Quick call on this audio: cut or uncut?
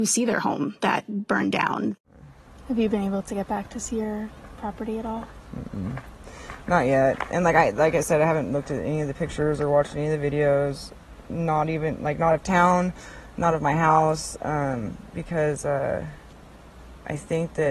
uncut